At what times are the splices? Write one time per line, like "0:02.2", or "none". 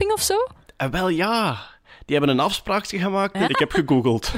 0:03.5